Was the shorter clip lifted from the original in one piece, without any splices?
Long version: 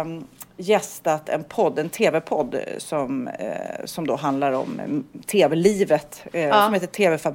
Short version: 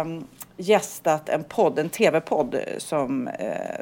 yes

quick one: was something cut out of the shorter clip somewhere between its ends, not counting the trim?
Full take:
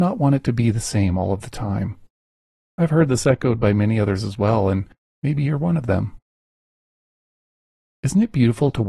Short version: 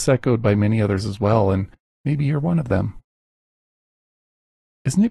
no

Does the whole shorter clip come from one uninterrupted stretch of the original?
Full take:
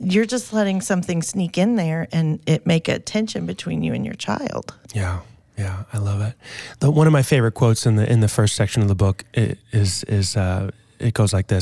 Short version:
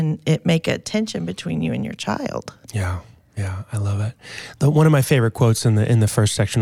yes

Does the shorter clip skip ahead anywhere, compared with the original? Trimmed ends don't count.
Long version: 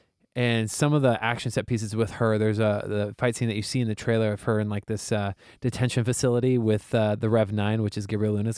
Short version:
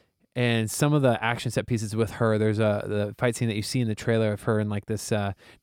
no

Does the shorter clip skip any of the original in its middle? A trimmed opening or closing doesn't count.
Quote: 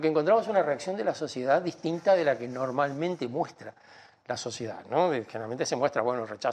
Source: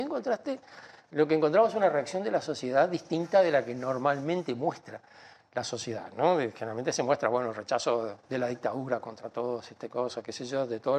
no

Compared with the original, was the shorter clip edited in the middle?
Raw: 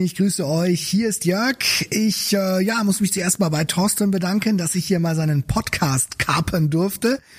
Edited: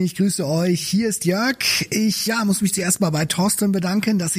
yes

